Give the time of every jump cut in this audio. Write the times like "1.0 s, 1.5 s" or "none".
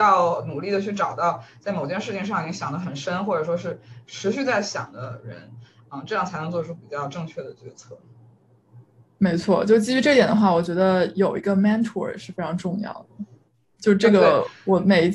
none